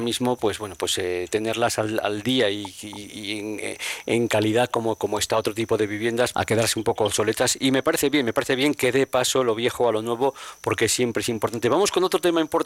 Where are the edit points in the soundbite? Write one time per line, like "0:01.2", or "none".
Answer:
0:06.3